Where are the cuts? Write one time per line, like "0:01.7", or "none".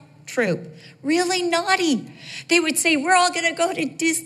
none